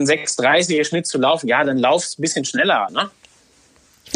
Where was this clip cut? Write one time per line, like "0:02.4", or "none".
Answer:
0:02.9